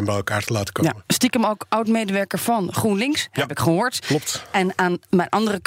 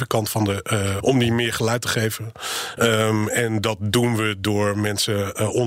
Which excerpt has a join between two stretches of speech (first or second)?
second